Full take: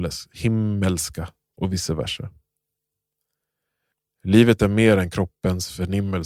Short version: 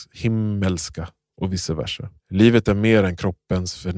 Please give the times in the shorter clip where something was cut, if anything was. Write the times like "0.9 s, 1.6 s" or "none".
2.2 s